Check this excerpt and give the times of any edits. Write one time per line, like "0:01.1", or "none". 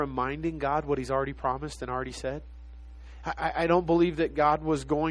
0:03.2